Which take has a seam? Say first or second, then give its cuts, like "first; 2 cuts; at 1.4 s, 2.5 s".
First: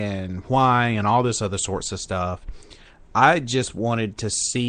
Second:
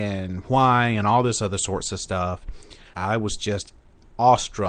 second; 1 cut; at 2.9 s